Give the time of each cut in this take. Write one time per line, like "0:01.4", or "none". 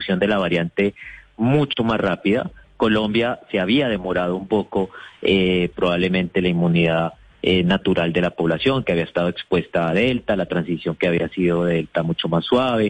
0:05.7